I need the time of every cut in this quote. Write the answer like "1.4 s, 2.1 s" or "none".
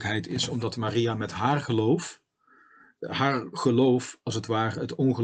3.0 s